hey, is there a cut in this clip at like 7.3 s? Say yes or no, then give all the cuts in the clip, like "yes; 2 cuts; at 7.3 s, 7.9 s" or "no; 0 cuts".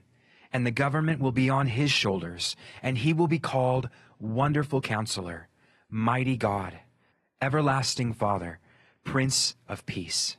no; 0 cuts